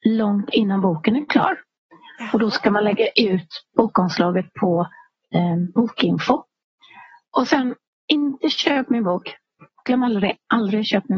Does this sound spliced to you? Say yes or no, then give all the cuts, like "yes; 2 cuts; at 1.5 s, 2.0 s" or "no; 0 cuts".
yes; 1 cut; at 7.2 s